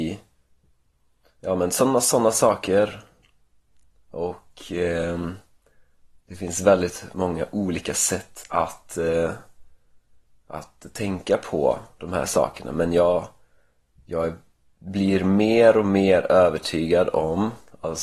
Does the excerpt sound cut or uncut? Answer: uncut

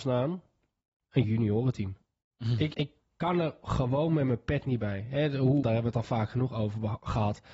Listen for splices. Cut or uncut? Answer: cut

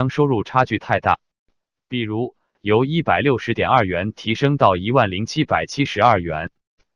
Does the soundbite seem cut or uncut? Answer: cut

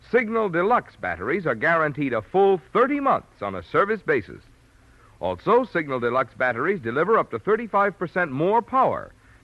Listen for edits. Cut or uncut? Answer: uncut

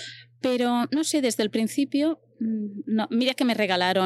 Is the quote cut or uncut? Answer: uncut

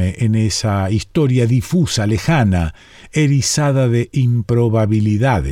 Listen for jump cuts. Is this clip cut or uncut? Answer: uncut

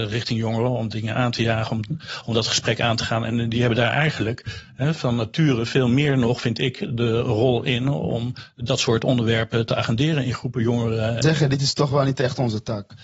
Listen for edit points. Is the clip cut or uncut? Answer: cut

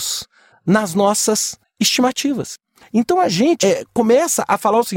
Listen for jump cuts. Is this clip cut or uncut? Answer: cut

